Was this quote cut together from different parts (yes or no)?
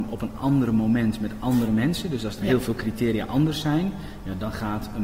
no